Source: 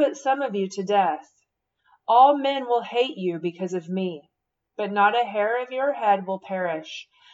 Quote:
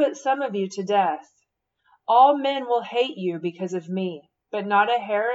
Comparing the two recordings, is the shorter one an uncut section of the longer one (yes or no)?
no